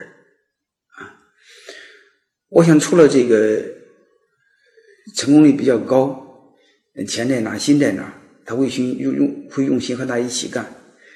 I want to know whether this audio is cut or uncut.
uncut